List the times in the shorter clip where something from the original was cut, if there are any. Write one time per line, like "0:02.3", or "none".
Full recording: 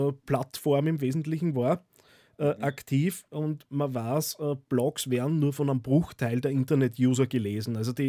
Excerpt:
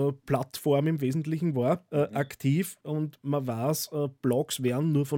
0:01.9